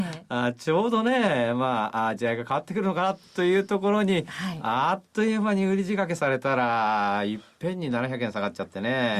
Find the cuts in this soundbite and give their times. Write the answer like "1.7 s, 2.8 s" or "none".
none